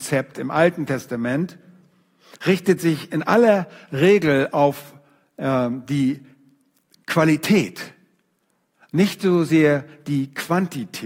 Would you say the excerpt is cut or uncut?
uncut